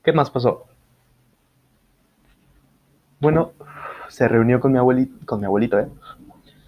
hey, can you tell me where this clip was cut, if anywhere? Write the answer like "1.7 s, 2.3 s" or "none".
none